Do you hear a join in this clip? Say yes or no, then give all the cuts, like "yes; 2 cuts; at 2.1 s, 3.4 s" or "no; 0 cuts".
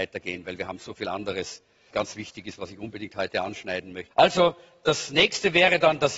yes; 2 cuts; at 1.9 s, 4.1 s